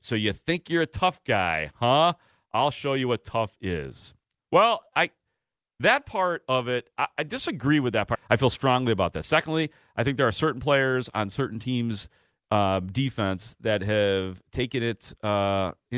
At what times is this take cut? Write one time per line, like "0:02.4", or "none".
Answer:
0:08.1